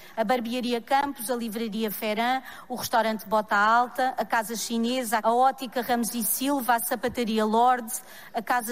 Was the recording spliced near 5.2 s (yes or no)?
yes